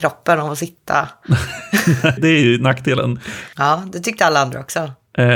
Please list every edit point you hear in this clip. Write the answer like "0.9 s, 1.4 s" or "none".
2.2 s, 3.5 s